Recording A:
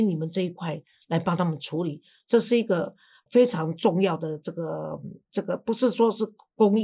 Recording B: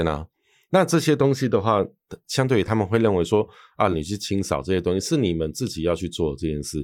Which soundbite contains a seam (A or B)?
B